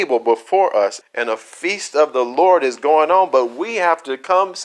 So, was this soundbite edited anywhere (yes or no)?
yes